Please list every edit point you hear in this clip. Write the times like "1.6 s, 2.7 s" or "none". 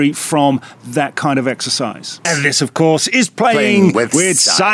2.2 s